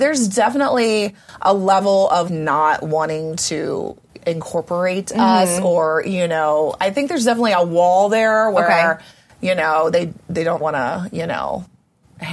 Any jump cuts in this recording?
yes; 2 cuts; at 2.3 s, 10.6 s

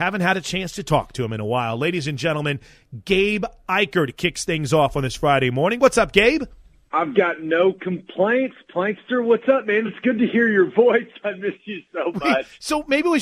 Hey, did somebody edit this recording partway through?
no; 0 cuts

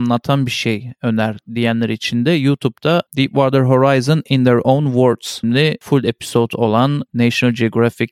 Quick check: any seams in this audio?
yes; 1 cut; at 5.4 s

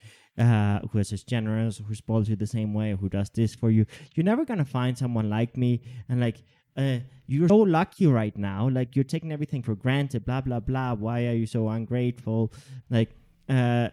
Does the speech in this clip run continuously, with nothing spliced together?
no; 2 cuts; at 7.5 s, 12.8 s

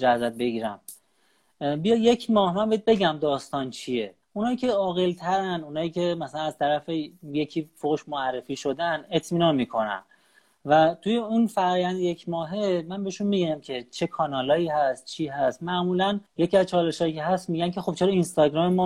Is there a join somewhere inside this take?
yes; 2 cuts; at 4.2 s, 16.3 s

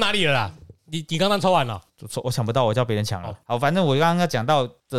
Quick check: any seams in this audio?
yes; 1 cut; at 3.4 s

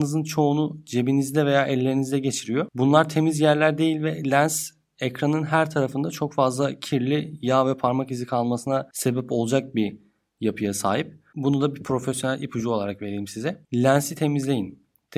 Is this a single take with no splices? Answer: no; 1 cut; at 11.3 s

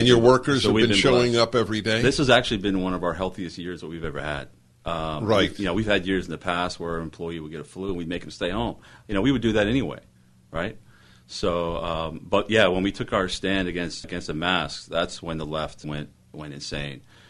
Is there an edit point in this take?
yes; 2 cuts; at 14.0 s, 15.8 s

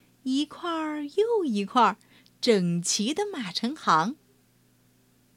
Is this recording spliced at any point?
no; 0 cuts

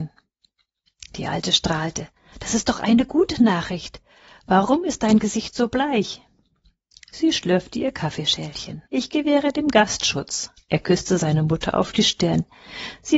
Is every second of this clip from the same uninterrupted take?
no; 3 cuts; at 6.9 s, 8.9 s, 10.6 s

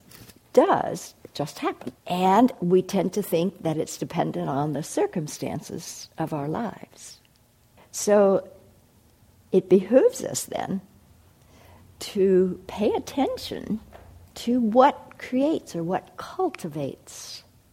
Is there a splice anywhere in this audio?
yes; 3 cuts; at 2.0 s, 7.8 s, 14.3 s

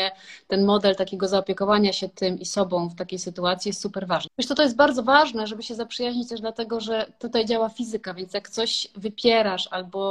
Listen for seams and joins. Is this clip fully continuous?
no; 1 cut; at 4.3 s

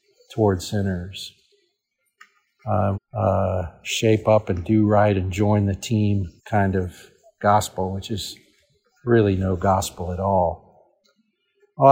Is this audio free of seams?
no; 2 cuts; at 2.9 s, 6.4 s

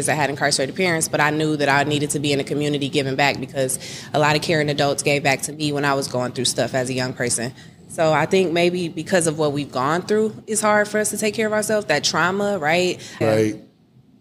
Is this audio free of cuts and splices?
no; 1 cut; at 13.2 s

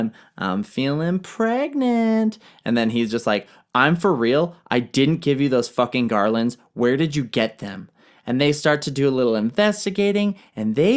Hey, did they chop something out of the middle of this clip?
no; 0 cuts

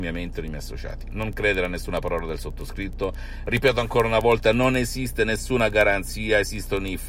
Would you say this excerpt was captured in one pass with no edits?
yes; 0 cuts

